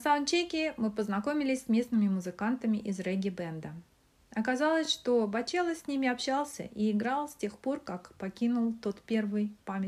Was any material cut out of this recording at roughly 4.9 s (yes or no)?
no